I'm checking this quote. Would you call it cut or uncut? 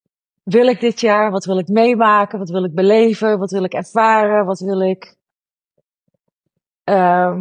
uncut